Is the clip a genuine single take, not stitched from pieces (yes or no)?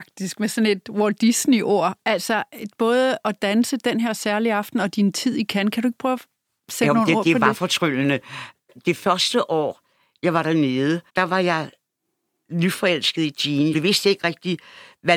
no